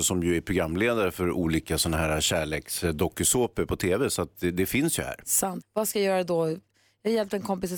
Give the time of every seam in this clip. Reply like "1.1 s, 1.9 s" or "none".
4.3 s, 5.6 s